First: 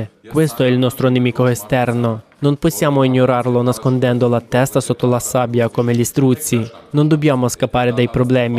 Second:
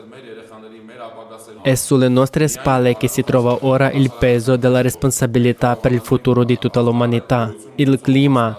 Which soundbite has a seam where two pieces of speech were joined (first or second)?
second